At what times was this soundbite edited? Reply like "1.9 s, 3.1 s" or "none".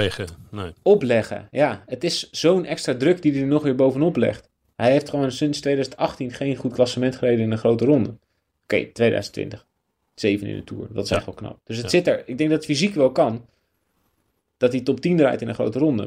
none